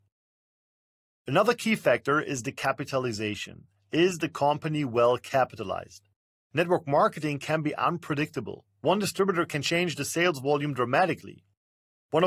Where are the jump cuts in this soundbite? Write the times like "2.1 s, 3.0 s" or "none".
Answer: none